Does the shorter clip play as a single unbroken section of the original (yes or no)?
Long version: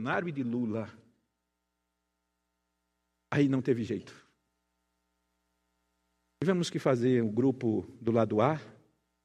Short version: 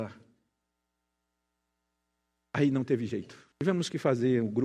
no